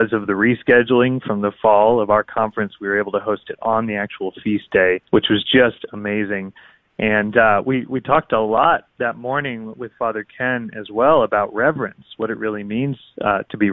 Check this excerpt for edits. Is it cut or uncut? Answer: cut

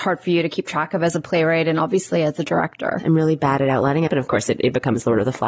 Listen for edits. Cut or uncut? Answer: cut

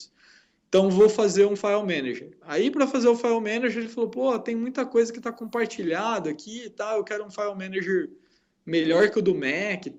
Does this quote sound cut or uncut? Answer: uncut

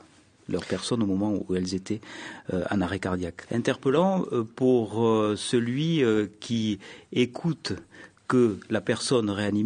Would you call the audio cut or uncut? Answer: cut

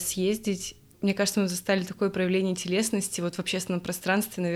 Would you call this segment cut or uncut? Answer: cut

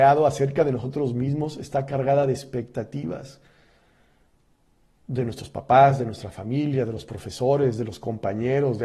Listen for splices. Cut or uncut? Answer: uncut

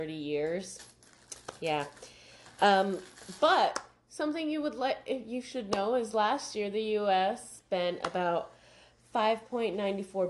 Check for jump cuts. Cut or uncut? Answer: uncut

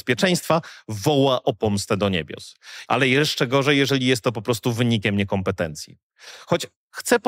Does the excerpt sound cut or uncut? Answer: cut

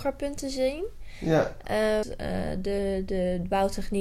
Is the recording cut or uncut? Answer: cut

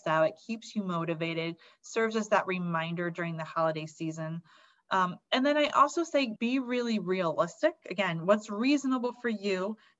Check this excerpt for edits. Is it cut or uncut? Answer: cut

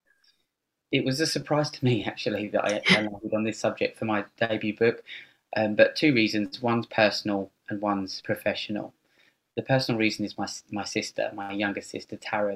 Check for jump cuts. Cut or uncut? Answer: uncut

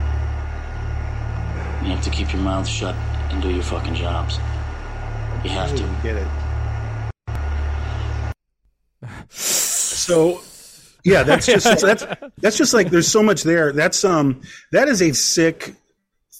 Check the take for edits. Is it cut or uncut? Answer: cut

